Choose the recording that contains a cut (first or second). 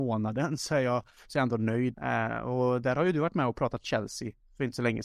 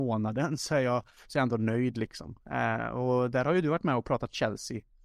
first